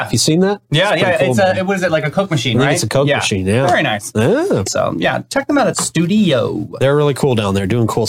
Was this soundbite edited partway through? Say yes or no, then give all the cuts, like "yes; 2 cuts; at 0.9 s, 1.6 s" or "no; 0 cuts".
yes; 1 cut; at 4.6 s